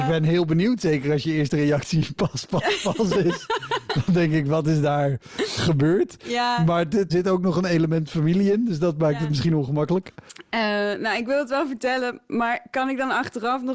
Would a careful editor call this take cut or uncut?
cut